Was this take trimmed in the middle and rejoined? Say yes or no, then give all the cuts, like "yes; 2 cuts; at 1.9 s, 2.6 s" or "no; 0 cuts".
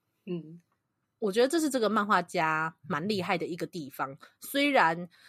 no; 0 cuts